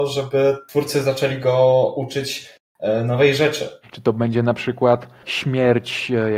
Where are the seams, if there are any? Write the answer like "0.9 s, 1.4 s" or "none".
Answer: 3.8 s